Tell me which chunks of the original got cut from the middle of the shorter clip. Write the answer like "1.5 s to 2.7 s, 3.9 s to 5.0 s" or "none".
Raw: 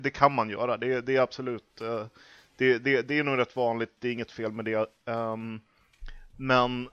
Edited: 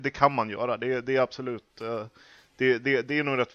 none